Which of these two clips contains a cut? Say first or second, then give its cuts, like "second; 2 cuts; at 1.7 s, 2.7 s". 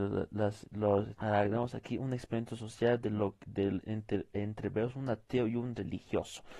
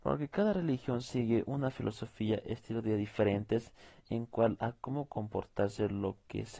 first; 1 cut; at 1.1 s